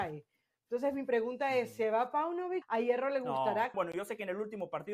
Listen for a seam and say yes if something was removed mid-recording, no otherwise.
yes